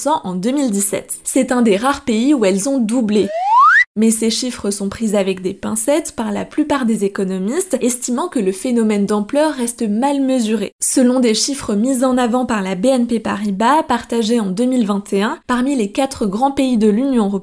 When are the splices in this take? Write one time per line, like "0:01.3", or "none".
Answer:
none